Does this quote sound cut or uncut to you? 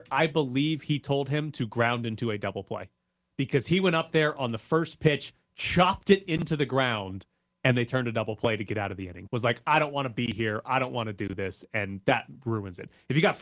cut